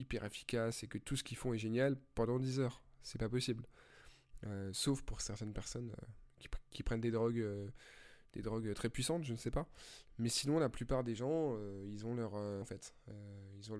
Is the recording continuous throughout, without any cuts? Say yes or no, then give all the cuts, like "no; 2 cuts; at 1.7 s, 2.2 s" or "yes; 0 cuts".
no; 1 cut; at 12.6 s